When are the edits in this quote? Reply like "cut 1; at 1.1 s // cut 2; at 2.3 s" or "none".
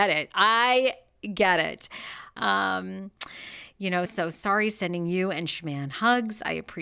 cut 1; at 2.4 s // cut 2; at 4.1 s